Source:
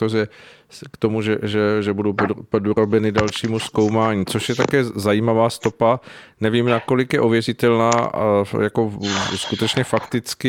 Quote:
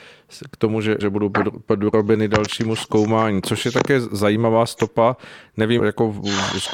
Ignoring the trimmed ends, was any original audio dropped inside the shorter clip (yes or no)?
yes